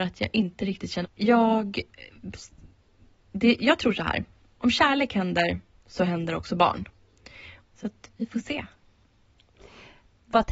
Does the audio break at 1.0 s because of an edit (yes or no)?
yes